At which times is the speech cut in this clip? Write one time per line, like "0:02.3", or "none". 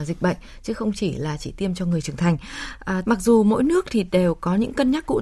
0:03.0